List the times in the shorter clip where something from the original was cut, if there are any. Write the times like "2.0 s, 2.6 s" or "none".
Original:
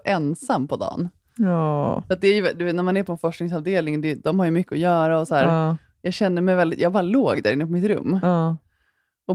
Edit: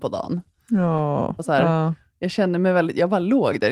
1.4 s